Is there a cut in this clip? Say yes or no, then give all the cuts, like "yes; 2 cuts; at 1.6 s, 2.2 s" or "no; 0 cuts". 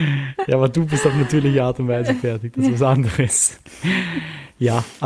no; 0 cuts